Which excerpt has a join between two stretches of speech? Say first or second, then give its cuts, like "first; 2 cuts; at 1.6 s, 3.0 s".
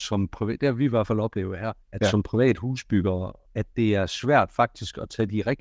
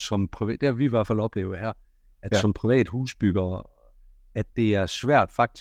first; 2 cuts; at 1.8 s, 3.4 s